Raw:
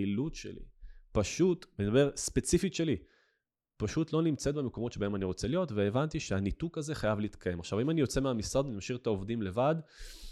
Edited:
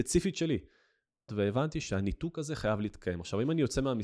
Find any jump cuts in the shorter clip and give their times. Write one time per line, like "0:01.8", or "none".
0:01.3